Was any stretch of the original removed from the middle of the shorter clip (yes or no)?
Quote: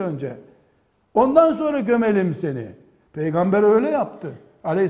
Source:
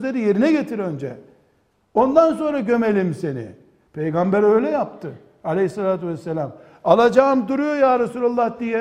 no